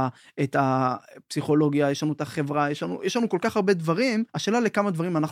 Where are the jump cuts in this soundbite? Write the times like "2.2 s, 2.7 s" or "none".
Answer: 4.3 s